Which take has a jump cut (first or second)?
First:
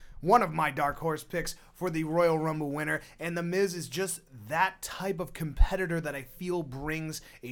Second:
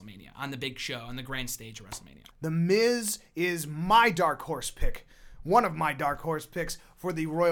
second